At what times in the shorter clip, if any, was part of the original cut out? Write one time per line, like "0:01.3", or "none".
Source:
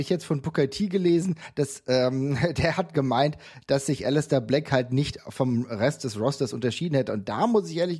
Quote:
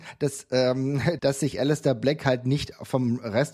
0:01.2